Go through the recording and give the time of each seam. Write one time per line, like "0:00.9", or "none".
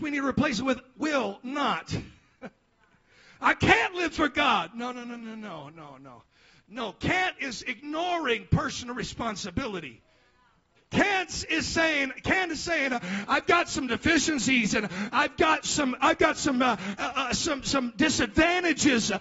0:10.8